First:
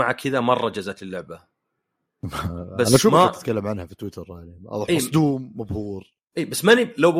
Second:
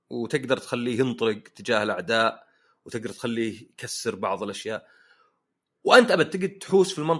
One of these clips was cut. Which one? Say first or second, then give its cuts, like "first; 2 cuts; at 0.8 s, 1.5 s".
first; 1 cut; at 2.1 s